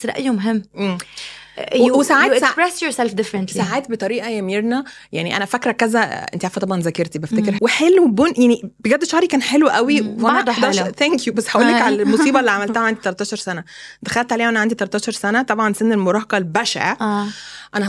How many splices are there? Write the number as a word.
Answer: one